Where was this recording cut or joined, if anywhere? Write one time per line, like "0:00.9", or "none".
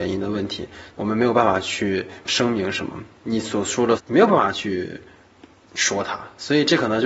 0:00.9
0:02.2
0:04.0